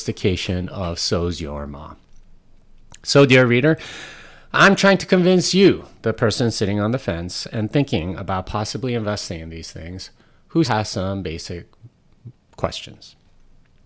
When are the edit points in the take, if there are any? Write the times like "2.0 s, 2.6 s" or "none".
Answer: 10.6 s